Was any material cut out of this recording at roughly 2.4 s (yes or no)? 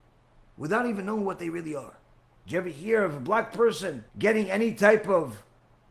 yes